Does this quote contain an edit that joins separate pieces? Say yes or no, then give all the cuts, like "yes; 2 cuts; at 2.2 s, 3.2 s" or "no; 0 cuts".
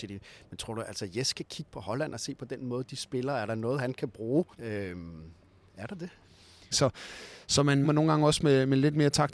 yes; 3 cuts; at 4.5 s, 6.7 s, 7.8 s